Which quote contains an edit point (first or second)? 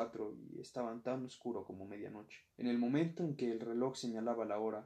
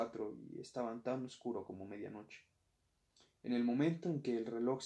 first